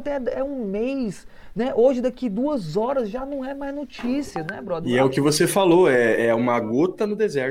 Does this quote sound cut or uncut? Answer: uncut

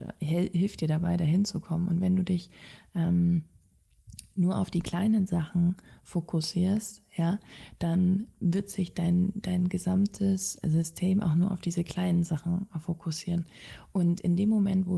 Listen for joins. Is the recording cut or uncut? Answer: uncut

